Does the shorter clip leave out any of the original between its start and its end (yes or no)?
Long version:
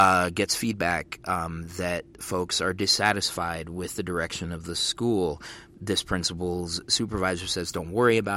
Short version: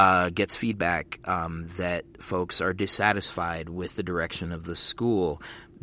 no